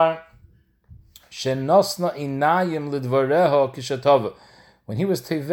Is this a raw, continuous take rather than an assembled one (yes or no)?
yes